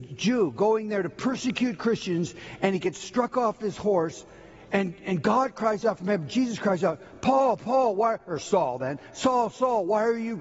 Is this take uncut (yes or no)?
yes